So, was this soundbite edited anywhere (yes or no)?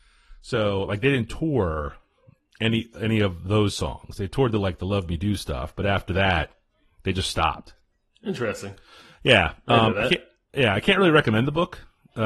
no